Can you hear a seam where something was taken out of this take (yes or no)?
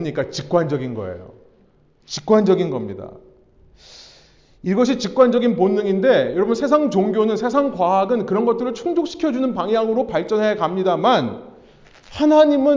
no